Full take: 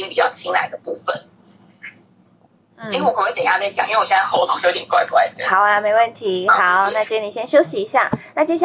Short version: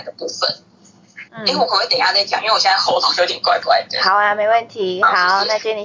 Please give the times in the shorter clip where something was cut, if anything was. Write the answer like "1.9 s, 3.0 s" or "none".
1.3 s